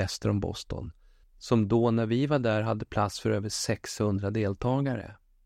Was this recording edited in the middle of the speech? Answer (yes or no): yes